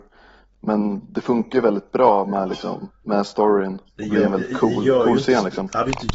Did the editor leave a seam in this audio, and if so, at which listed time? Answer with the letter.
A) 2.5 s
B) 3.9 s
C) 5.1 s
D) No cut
B